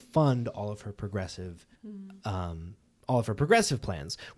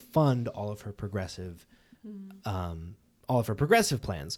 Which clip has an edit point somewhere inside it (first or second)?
first